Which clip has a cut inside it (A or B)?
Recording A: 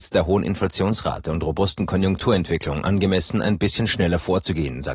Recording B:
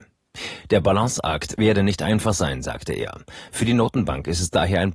B